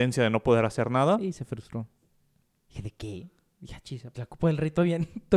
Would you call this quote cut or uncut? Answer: cut